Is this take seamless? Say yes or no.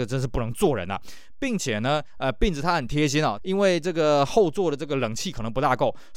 no